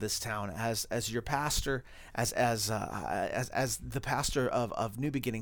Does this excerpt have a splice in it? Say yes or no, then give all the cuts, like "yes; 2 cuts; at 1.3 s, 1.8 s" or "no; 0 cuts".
no; 0 cuts